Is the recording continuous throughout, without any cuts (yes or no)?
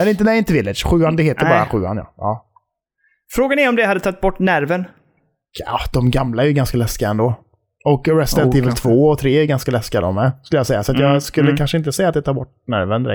yes